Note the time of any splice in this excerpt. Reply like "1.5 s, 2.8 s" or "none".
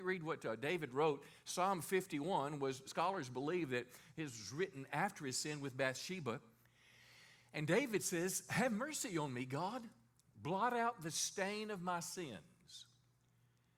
2.9 s

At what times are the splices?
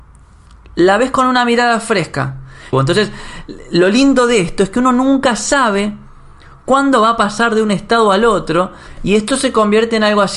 2.7 s

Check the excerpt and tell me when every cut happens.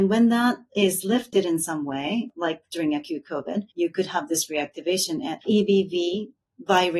3.7 s, 5.4 s

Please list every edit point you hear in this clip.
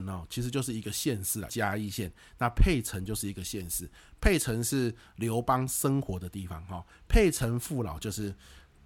1.5 s

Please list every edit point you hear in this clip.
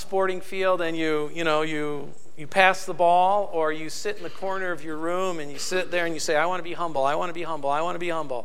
none

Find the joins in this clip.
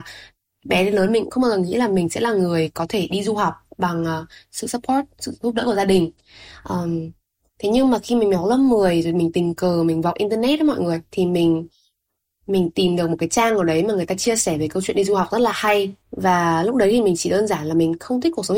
16.0 s

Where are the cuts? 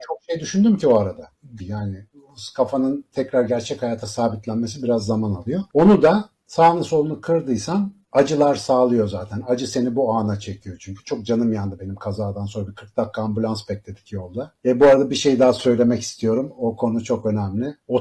1.6 s

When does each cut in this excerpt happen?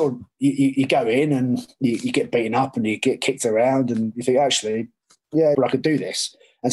5.5 s

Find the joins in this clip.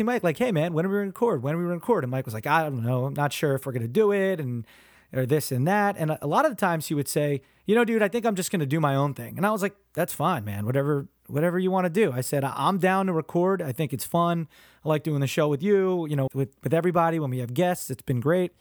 16.3 s

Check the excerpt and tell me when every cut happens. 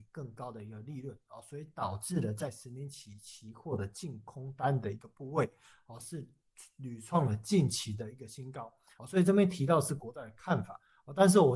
9.0 s

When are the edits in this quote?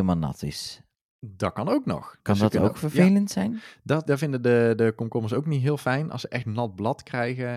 4.1 s

